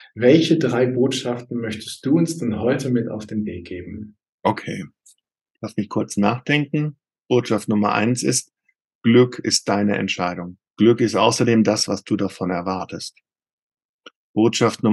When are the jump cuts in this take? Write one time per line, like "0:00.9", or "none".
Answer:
0:10.7
0:11.9